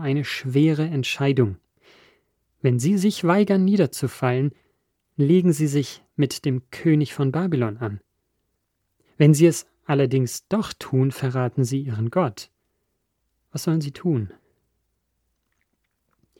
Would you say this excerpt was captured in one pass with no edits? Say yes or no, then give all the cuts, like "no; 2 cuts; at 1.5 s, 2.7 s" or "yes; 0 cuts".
yes; 0 cuts